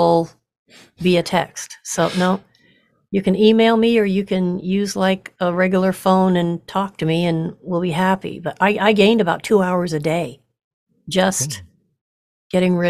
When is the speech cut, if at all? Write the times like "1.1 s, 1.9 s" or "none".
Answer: none